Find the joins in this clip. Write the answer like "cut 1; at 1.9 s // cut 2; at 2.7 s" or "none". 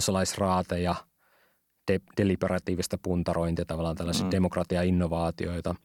none